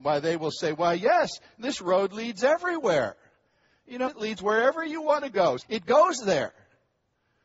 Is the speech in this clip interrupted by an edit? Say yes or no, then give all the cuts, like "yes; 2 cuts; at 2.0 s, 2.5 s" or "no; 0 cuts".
yes; 2 cuts; at 4.0 s, 5.6 s